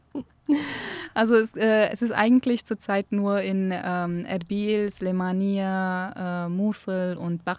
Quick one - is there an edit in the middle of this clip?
no; 0 cuts

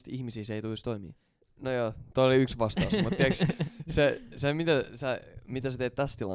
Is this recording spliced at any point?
yes; 1 cut; at 1.4 s

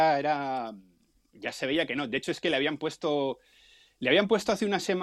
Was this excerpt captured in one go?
yes; 0 cuts

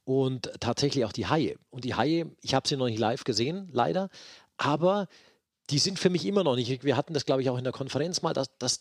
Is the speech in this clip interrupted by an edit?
no; 0 cuts

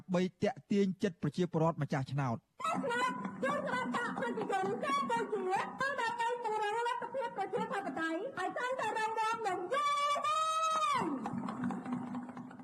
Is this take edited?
no; 0 cuts

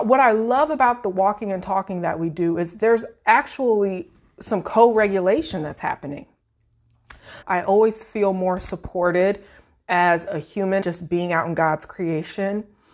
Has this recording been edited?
yes; 2 cuts; at 7.4 s, 10.8 s

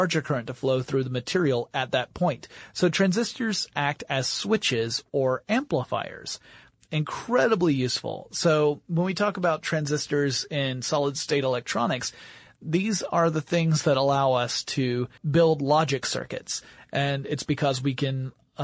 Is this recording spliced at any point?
yes; 1 cut; at 15.2 s

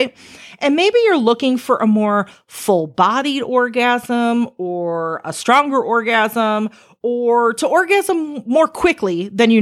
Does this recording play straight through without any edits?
yes; 0 cuts

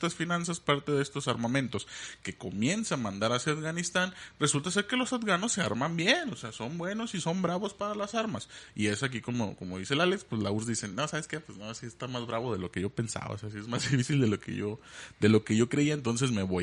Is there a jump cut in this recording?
no; 0 cuts

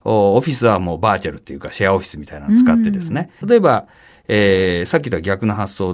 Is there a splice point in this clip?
yes; 1 cut; at 3.4 s

